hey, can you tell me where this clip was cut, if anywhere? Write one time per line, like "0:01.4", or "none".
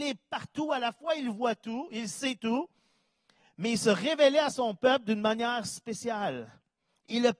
none